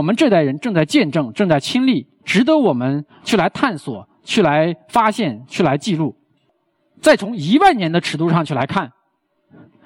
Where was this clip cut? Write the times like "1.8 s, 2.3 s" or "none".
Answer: 2.2 s

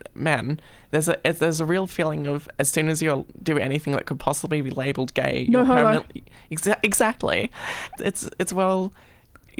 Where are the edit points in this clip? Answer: 8.0 s

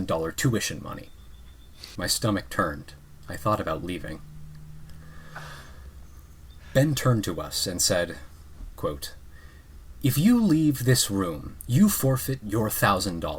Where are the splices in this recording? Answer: 2.0 s, 8.8 s

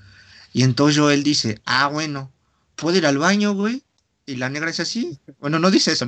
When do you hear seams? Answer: none

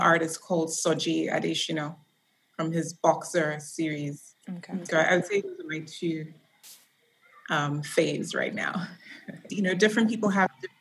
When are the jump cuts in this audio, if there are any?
9.5 s

